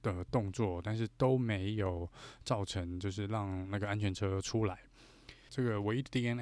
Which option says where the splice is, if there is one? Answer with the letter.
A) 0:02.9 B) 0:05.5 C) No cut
B